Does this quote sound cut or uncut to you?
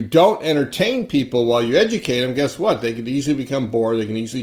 uncut